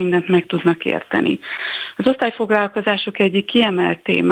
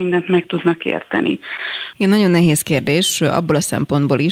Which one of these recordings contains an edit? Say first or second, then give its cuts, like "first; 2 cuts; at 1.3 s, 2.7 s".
second; 1 cut; at 1.9 s